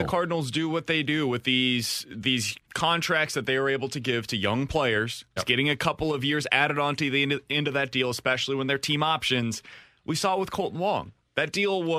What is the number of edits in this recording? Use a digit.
1